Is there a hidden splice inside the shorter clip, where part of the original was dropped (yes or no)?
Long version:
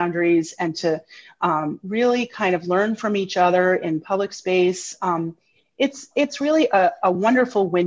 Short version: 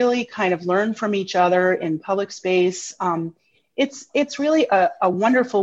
no